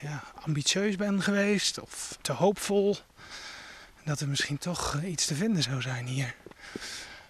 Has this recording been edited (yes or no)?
yes